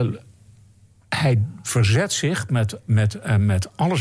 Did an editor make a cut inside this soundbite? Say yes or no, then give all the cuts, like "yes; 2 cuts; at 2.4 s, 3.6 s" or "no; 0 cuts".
no; 0 cuts